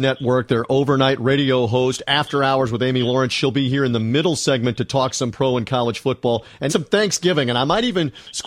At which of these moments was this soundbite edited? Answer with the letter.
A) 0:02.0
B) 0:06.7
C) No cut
B